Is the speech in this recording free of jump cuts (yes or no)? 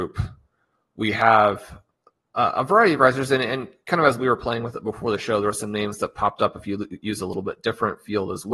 yes